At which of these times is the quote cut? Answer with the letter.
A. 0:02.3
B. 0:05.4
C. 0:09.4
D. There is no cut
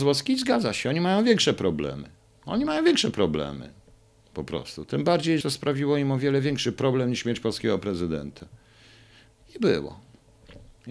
B